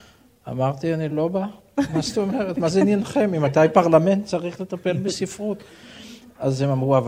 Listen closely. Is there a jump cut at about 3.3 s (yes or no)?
no